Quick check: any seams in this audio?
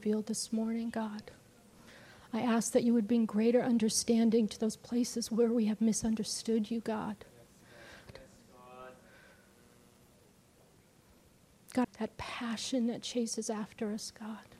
yes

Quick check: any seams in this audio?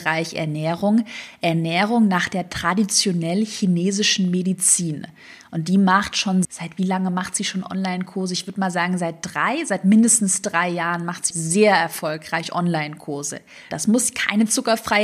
yes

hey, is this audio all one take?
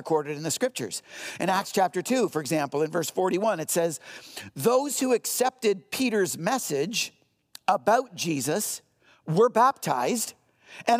yes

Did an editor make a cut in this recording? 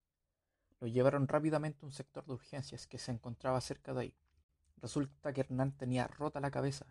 no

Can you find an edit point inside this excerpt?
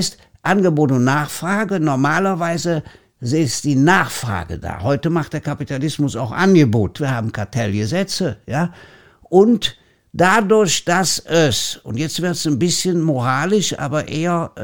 yes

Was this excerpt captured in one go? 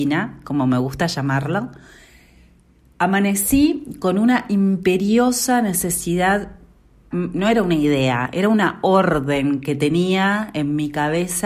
no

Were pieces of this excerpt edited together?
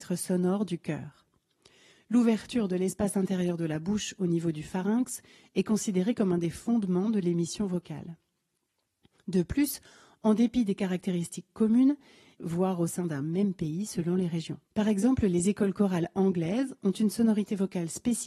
yes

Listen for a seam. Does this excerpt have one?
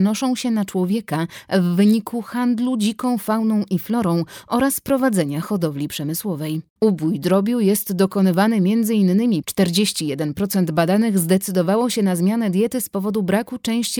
yes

